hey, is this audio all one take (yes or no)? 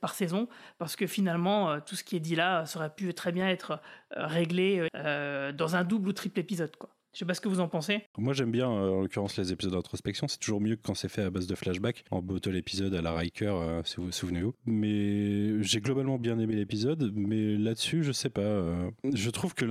no